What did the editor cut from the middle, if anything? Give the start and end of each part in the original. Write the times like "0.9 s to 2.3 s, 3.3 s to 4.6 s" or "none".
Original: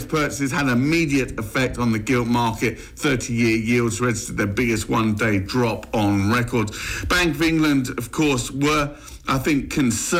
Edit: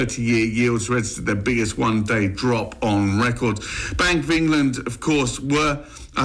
none